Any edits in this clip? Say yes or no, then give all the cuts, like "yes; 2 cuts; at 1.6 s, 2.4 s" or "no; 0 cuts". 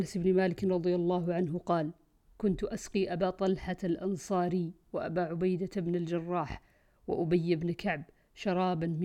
no; 0 cuts